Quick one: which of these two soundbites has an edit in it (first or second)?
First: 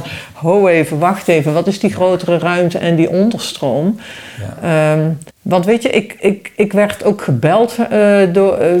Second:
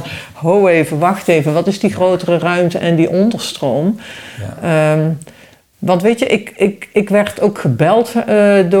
first